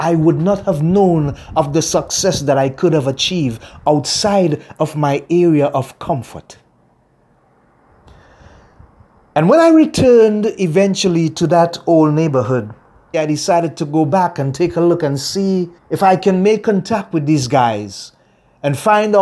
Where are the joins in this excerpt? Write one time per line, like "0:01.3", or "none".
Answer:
0:13.1
0:15.8